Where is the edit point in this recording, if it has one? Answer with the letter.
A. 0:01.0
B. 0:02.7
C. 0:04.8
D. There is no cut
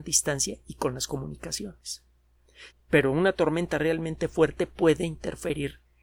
B